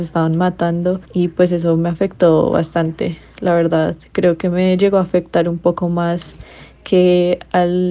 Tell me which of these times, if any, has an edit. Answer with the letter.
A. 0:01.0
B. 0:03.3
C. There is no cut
A